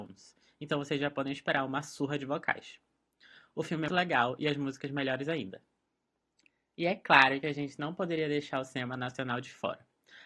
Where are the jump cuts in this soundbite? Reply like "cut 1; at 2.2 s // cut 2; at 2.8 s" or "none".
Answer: cut 1; at 3.9 s